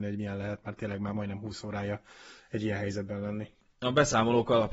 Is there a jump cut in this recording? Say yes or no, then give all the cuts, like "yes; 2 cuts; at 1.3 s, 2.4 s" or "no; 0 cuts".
no; 0 cuts